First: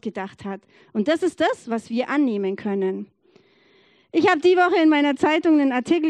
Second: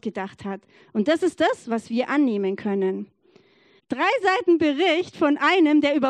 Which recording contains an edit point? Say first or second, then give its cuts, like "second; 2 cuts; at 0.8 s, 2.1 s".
second; 1 cut; at 3.8 s